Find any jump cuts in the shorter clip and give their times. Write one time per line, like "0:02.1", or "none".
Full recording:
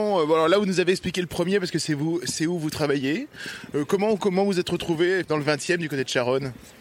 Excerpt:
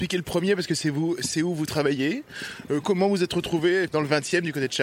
0:02.8